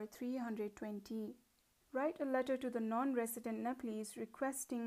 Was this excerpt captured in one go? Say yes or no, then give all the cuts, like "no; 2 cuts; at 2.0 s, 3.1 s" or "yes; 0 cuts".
no; 1 cut; at 1.8 s